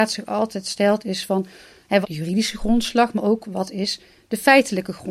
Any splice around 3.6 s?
no; 1 cut; at 2.0 s

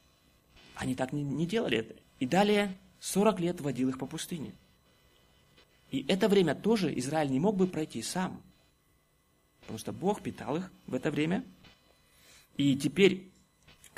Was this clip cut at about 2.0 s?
yes; 1 cut; at 2.0 s

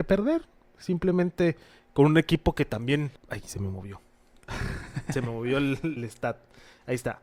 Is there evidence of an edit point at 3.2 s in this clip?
yes; 2 cuts; at 3.2 s, 6.0 s

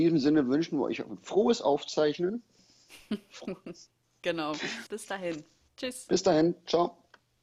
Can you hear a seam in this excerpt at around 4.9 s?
yes; 1 cut; at 4.9 s

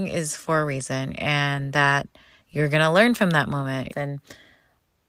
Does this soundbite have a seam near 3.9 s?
yes; 1 cut; at 3.9 s

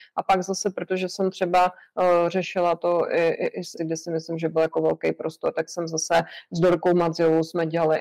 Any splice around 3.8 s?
yes; 1 cut; at 3.8 s

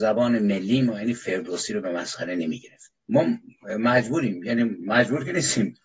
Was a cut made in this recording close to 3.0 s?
yes; 1 cut; at 3.0 s

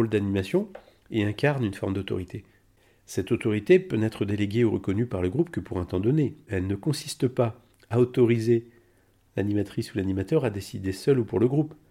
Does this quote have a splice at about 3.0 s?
no; 0 cuts

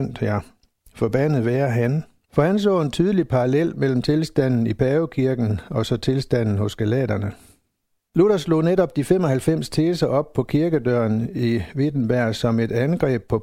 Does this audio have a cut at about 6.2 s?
no; 2 cuts; at 2.2 s, 8.1 s

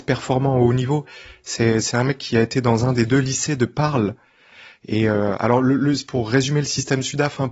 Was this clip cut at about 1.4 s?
no; 0 cuts

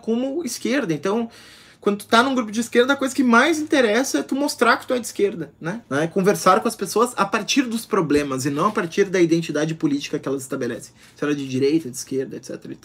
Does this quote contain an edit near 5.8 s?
yes; 1 cut; at 5.8 s

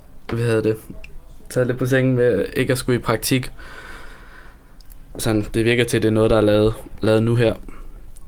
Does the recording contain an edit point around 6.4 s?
no; 1 cut; at 5.1 s

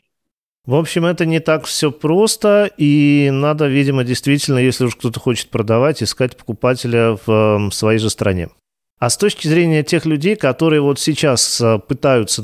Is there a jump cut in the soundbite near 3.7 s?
no; 1 cut; at 8.9 s

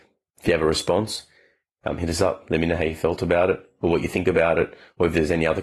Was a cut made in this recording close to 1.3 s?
no; 0 cuts

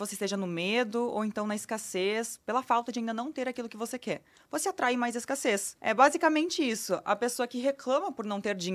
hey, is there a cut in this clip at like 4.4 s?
no; 1 cut; at 5.7 s

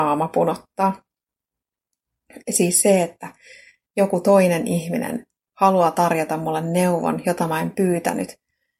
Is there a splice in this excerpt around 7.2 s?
no; 0 cuts

